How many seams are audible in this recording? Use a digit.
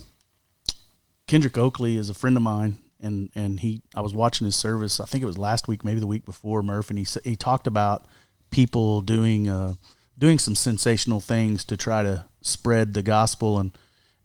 0